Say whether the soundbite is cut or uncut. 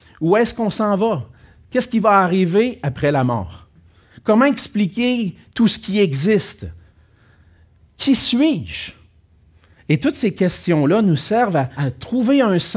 cut